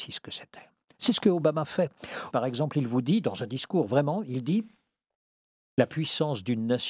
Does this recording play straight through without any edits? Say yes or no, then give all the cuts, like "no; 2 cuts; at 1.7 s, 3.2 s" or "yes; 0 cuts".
no; 1 cut; at 2.3 s